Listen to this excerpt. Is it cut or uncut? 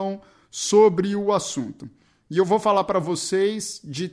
uncut